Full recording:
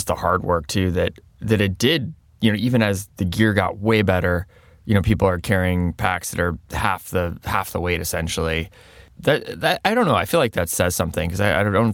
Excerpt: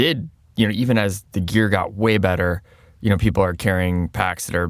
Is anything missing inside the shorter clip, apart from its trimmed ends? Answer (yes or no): no